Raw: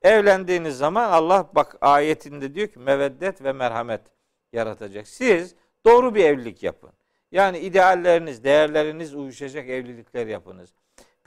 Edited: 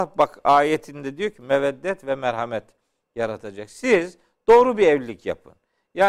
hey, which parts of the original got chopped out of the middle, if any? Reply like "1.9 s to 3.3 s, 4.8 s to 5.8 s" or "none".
none

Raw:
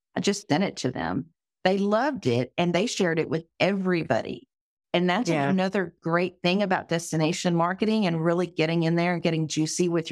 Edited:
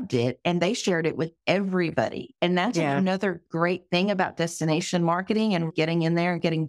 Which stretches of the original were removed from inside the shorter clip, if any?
4.5 s to 4.9 s, 8.2 s to 8.5 s

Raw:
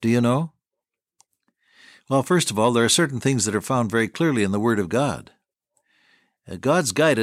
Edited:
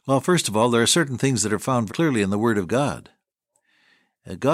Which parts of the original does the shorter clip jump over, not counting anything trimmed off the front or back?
3.9 s to 4.1 s

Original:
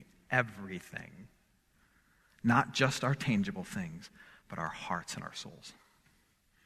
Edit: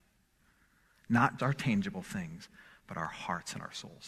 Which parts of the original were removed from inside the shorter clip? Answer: 2.7 s to 3.0 s

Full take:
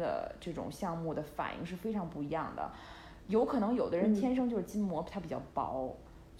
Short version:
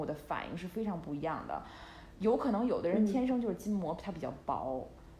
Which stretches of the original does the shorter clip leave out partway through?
none

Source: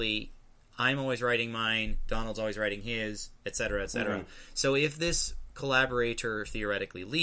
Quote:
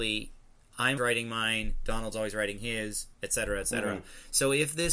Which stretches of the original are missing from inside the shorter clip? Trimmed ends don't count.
1.0 s to 1.2 s

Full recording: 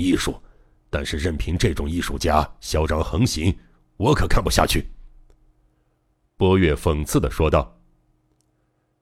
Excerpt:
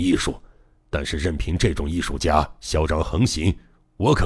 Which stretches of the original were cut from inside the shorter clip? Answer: none

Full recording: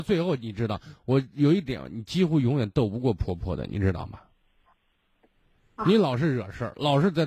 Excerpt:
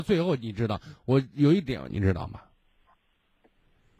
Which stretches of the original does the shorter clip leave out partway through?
1.9 s to 3.7 s

